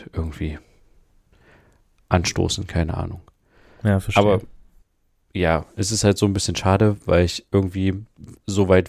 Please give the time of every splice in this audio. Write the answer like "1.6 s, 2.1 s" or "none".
none